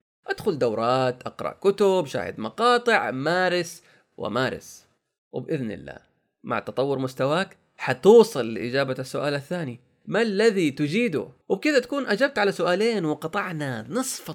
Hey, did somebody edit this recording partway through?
yes; 2 cuts; at 4.0 s, 11.4 s

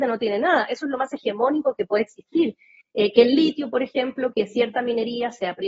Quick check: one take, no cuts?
no; 2 cuts; at 2.8 s, 4.3 s

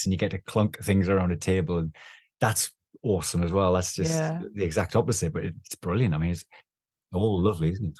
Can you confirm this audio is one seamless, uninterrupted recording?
yes; 0 cuts

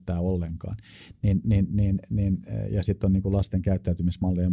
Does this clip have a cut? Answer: yes; 1 cut; at 1.1 s

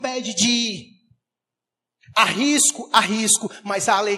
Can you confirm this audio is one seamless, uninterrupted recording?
yes; 0 cuts

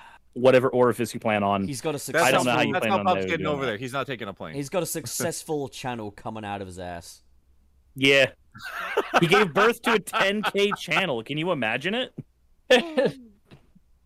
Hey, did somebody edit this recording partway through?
no; 0 cuts

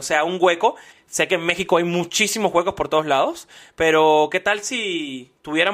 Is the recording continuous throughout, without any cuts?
no; 1 cut; at 0.9 s

